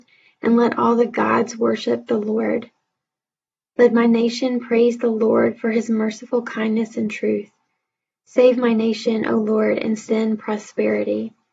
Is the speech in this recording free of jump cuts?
yes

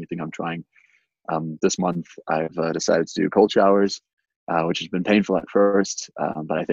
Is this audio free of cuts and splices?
yes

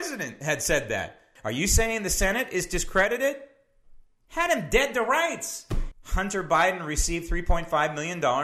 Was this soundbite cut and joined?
yes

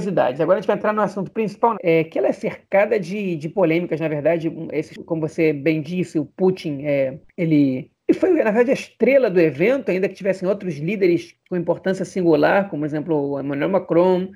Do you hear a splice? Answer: yes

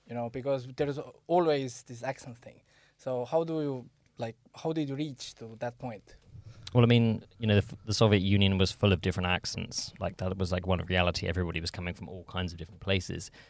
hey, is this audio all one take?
yes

